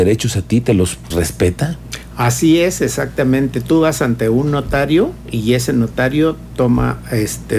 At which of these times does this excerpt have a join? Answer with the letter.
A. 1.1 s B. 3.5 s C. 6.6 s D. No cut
A